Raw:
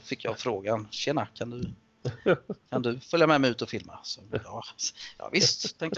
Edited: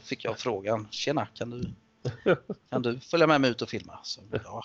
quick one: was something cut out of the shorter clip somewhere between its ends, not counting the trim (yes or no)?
no